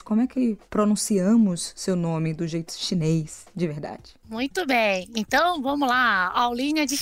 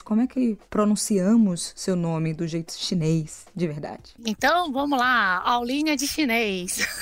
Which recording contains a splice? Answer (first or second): second